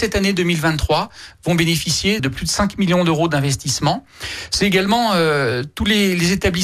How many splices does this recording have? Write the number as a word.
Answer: one